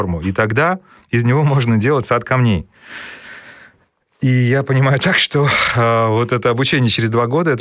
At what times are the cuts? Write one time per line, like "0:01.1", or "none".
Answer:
none